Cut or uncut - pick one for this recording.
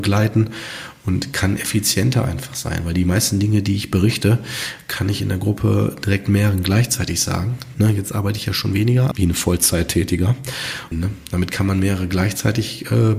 cut